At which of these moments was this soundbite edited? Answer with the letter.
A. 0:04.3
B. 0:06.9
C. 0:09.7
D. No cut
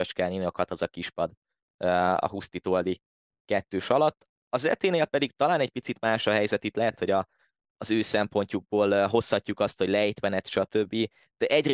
D